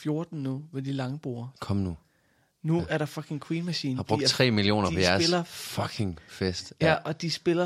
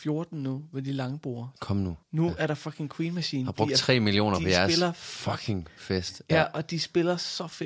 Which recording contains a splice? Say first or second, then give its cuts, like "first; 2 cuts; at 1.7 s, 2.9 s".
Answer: second; 1 cut; at 2.0 s